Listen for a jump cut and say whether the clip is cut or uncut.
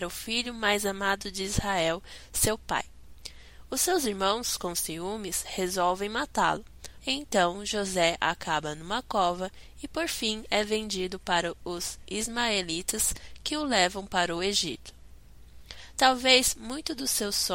cut